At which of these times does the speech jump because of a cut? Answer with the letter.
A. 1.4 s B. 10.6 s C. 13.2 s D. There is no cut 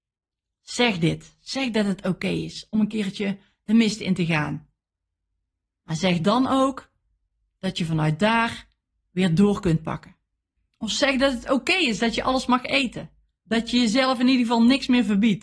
B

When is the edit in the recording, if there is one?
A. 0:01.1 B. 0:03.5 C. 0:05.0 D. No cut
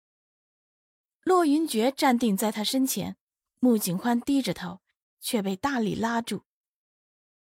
C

